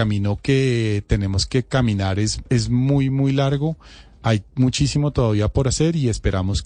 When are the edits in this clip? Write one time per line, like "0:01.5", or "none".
0:03.1